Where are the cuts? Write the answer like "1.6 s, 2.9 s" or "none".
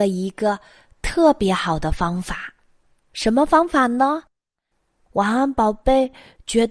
4.7 s